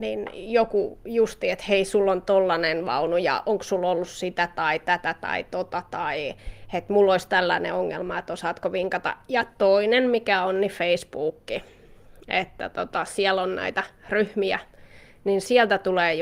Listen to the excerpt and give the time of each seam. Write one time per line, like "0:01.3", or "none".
none